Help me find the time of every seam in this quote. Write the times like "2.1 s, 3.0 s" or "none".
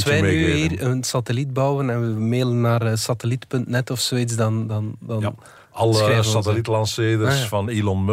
none